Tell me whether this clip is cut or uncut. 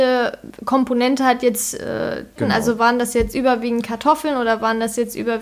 cut